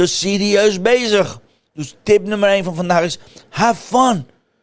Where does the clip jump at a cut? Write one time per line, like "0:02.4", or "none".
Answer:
none